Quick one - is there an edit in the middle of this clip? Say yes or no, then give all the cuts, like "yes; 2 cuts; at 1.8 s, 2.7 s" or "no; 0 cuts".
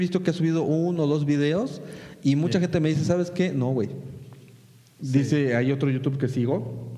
no; 0 cuts